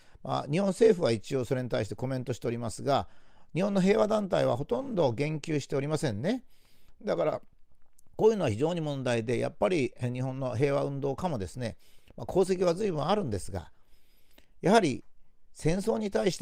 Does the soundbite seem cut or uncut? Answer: uncut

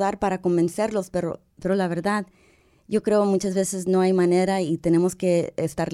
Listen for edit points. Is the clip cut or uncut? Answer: uncut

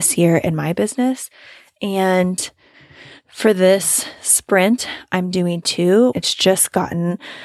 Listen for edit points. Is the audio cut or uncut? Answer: cut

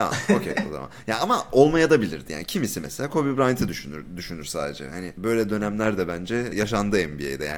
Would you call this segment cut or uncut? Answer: uncut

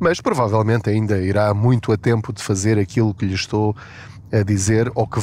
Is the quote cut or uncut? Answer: uncut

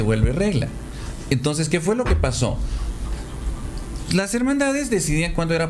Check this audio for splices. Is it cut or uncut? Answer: uncut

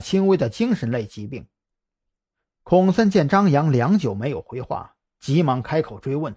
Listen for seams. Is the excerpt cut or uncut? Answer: cut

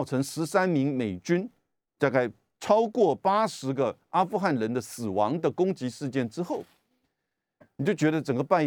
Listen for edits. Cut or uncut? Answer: cut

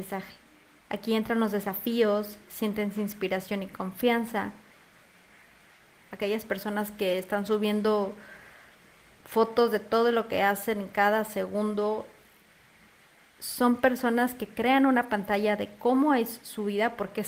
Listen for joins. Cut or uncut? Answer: cut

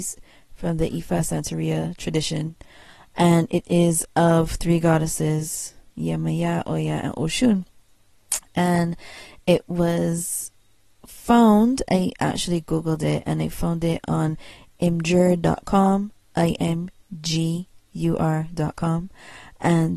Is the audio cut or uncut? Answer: uncut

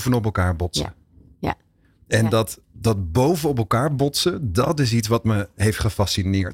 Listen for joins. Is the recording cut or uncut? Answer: uncut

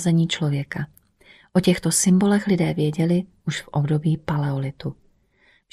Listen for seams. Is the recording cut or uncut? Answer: uncut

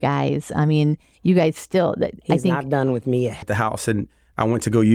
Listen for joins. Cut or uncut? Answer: cut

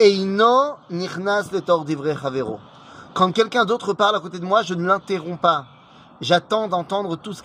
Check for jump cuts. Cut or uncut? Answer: uncut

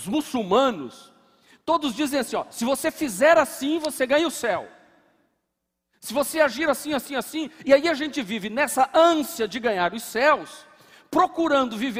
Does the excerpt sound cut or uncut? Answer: uncut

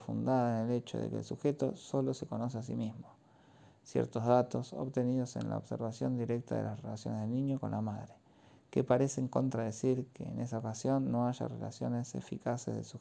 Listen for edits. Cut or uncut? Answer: uncut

